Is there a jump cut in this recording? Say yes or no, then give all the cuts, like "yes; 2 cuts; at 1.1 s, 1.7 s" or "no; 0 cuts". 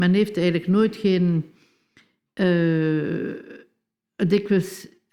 no; 0 cuts